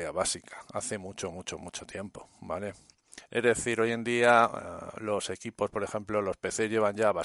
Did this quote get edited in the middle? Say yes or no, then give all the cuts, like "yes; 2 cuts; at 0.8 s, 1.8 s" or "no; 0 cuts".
no; 0 cuts